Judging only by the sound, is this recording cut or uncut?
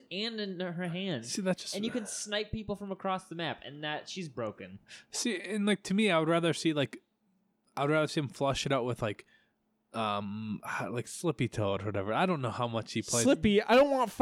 uncut